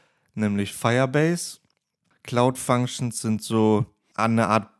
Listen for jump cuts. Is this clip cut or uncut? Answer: cut